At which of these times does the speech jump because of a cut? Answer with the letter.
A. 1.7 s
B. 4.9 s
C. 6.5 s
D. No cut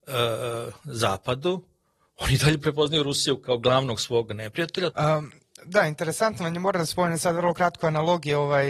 B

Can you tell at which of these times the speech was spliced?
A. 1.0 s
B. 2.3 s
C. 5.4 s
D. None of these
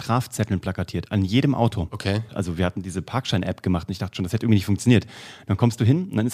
B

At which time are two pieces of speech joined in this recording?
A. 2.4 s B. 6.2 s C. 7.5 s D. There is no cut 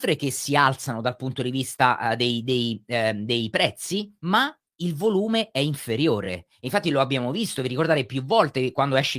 D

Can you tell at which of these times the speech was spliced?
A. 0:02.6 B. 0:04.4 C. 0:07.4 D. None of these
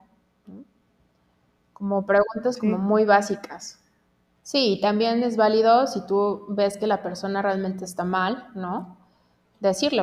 B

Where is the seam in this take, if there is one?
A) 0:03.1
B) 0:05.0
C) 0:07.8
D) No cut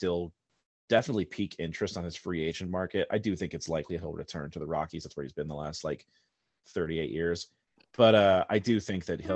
D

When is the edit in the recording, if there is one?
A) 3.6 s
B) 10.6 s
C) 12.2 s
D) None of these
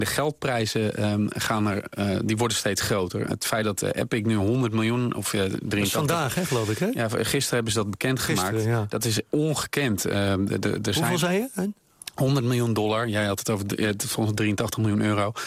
D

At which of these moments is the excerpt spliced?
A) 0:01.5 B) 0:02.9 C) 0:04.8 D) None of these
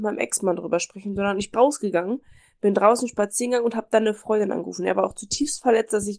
A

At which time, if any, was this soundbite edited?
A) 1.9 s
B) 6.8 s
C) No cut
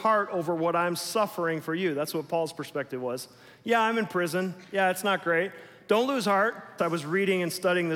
B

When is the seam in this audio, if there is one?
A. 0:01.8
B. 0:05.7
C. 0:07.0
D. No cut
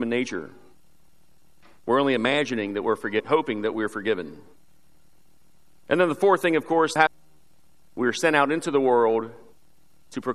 C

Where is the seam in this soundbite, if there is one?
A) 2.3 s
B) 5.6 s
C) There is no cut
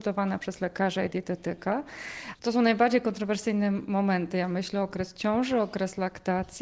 A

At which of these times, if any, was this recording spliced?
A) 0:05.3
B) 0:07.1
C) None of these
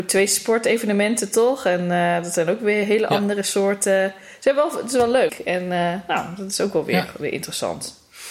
A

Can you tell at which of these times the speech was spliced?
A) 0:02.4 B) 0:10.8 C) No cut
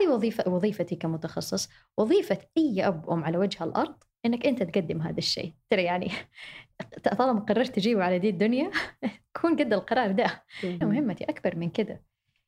B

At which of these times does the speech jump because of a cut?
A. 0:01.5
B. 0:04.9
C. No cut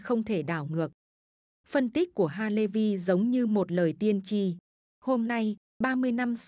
A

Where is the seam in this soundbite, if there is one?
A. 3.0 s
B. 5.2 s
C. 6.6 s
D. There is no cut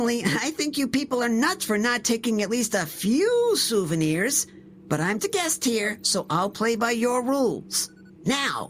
B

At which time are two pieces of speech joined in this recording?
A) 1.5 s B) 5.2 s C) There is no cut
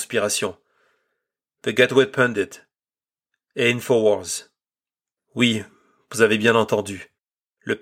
B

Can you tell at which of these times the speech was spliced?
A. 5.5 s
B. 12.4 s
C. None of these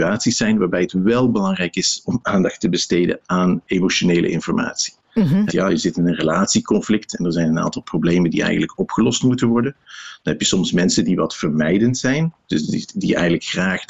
A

